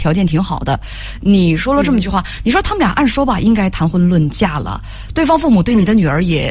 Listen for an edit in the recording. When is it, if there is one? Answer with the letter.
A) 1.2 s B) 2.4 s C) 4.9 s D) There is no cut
D